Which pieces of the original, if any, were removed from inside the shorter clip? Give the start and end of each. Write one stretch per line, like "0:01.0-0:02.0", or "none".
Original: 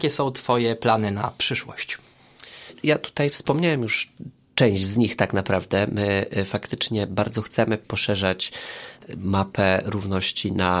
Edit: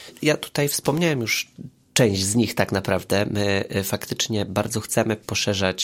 none